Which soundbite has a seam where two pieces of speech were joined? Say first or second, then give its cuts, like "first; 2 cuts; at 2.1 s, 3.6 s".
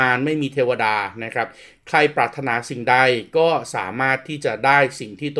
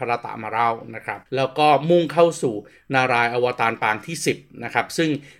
second; 1 cut; at 1.3 s